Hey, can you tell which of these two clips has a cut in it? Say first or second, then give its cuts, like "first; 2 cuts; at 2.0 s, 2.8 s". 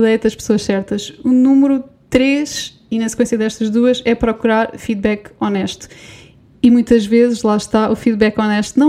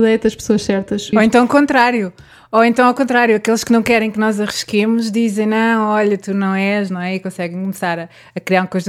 second; 1 cut; at 1.1 s